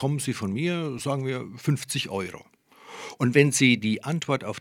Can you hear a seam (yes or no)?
no